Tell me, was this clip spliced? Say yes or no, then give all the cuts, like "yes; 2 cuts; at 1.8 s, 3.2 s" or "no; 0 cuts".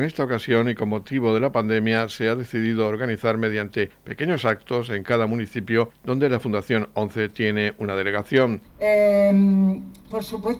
yes; 1 cut; at 8.6 s